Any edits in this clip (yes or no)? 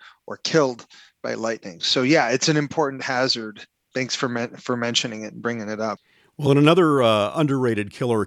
no